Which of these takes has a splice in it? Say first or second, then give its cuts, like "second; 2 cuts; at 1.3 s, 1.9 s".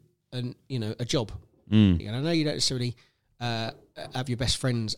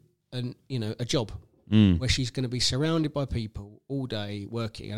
first; 1 cut; at 2.0 s